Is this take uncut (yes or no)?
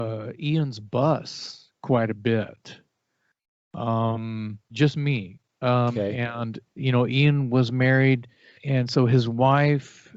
no